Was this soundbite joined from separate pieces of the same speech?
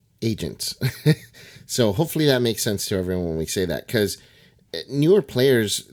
no; 0 cuts

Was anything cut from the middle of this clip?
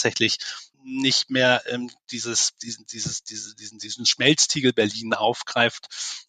no; 0 cuts

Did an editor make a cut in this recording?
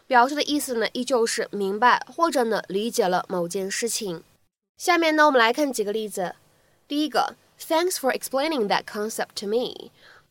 no; 0 cuts

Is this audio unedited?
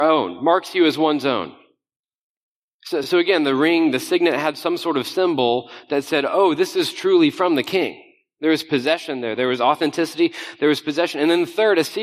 yes; 0 cuts

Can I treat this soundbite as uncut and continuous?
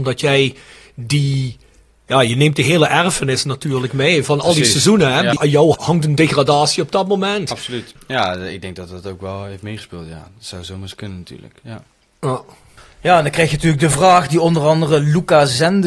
yes; 0 cuts

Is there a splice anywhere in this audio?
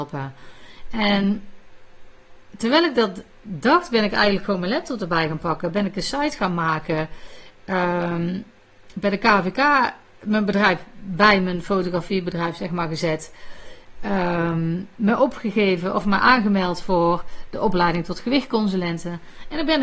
no; 0 cuts

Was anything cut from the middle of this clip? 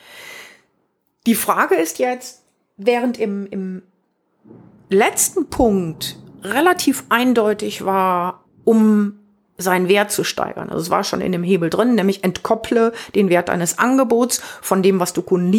yes; 1 cut; at 8.5 s

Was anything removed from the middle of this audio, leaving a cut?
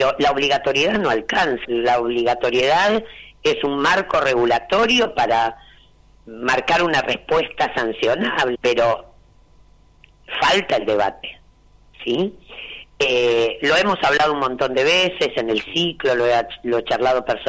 yes; 2 cuts; at 1.6 s, 8.5 s

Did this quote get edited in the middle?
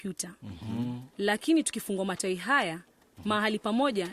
no; 0 cuts

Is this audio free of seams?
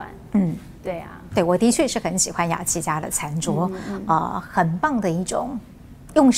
yes; 0 cuts

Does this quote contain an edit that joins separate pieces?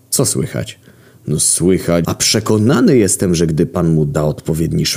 yes; 1 cut; at 2.0 s

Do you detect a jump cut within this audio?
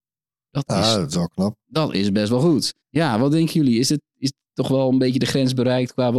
yes; 1 cut; at 2.8 s

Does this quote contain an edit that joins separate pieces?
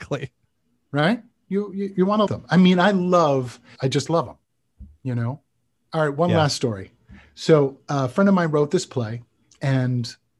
yes; 3 cuts; at 2.3 s, 3.8 s, 5.9 s

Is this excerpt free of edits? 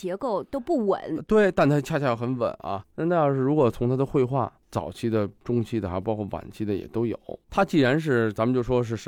no; 1 cut; at 2.8 s

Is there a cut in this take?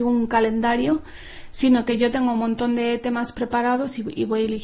no; 0 cuts

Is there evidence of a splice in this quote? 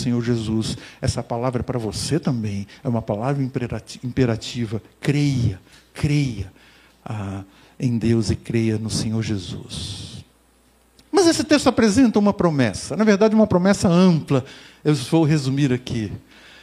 no; 0 cuts

